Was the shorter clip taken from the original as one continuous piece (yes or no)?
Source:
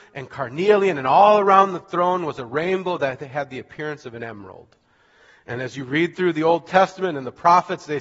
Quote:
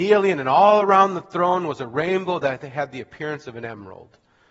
yes